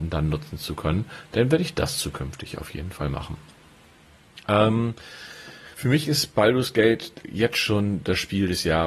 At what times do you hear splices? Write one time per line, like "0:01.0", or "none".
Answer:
0:05.7
0:07.2